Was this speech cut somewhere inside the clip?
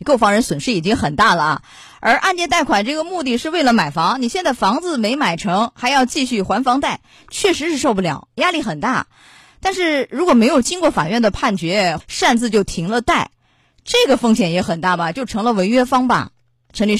yes; 1 cut; at 12.0 s

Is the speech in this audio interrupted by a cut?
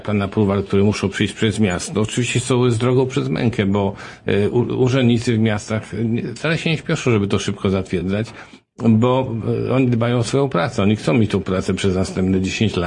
no; 0 cuts

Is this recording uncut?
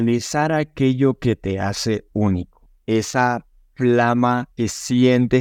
no; 1 cut; at 4.5 s

